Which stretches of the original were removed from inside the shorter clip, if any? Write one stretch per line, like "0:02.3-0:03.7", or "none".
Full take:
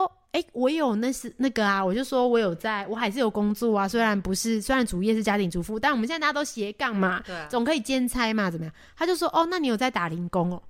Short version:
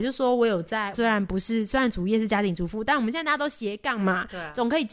0:02.9-0:03.9